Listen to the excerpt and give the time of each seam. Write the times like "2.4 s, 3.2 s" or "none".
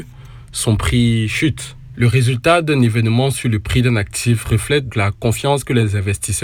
4.9 s